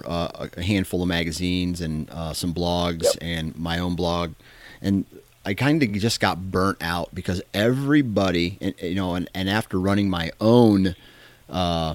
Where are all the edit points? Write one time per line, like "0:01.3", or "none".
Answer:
none